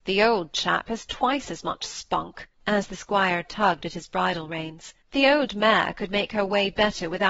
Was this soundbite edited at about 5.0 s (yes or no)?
yes